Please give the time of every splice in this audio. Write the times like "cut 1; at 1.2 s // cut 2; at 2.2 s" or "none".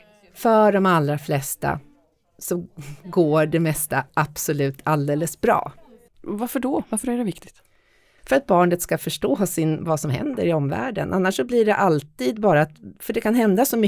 cut 1; at 6.1 s